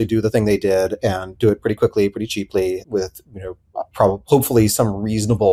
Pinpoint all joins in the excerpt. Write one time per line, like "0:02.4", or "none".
0:02.8